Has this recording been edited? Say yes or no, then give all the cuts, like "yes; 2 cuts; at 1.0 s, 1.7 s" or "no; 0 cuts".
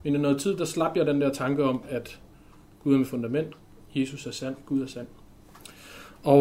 no; 0 cuts